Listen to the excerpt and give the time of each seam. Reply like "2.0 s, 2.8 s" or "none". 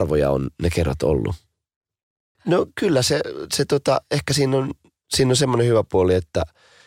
2.4 s